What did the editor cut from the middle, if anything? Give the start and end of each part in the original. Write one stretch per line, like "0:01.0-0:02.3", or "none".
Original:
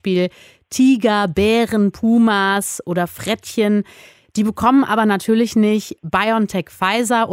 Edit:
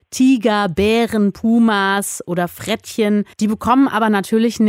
0:03.9-0:04.3